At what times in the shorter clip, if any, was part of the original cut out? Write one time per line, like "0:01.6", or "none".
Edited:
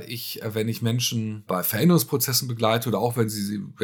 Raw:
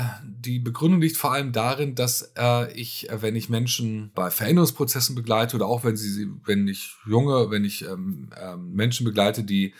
none